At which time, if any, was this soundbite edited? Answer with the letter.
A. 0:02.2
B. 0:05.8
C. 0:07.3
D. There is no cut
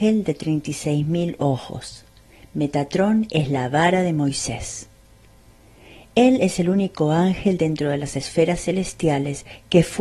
D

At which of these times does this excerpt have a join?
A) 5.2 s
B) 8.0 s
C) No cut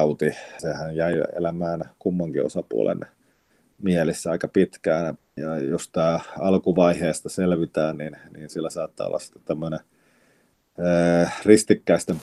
A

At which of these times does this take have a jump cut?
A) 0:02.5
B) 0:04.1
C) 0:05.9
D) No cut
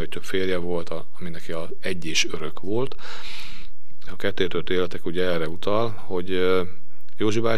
B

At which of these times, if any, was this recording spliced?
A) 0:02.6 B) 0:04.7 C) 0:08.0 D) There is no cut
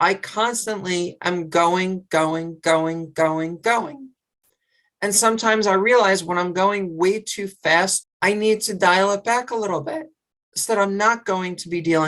C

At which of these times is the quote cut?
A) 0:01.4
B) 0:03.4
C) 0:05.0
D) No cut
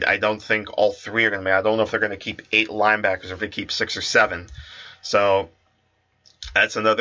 B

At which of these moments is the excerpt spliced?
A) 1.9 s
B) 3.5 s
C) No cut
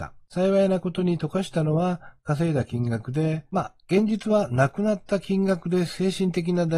B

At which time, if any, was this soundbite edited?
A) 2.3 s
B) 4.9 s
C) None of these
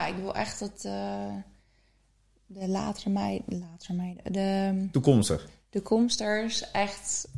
C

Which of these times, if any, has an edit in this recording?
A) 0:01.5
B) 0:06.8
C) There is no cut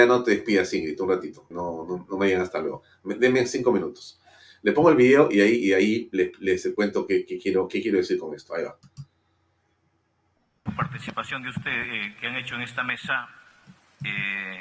A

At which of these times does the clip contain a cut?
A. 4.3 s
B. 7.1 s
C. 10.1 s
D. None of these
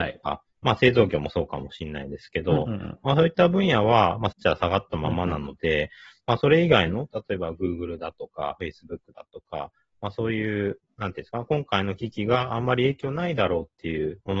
A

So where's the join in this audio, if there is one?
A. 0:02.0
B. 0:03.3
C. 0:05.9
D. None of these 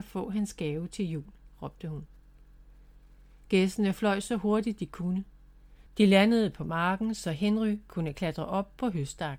C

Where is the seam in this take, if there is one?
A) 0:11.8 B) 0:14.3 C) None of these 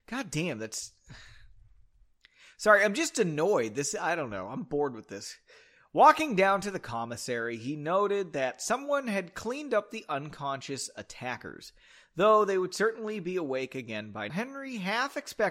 B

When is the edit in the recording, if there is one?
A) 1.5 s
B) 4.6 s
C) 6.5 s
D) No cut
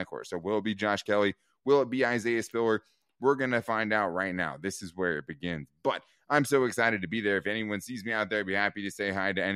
D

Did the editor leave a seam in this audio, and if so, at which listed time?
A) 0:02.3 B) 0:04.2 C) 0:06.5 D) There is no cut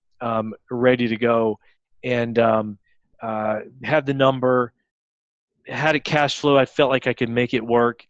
D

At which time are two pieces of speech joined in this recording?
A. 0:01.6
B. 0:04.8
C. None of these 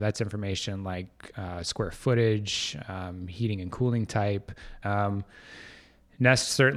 B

